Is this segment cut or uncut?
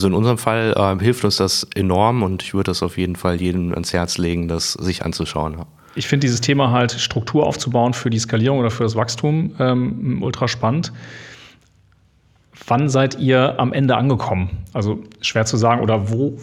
uncut